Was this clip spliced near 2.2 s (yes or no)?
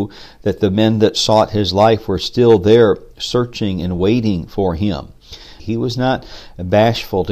no